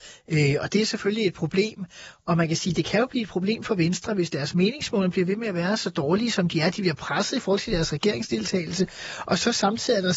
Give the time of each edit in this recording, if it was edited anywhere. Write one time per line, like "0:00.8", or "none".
none